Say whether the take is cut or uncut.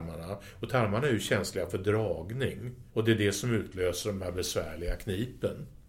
cut